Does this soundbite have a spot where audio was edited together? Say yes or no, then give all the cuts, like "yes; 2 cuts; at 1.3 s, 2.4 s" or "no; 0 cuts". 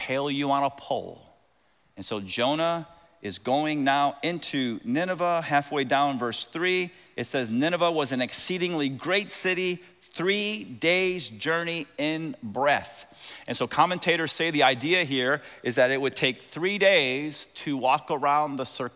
no; 0 cuts